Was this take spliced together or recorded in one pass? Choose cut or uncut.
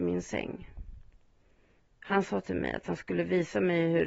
cut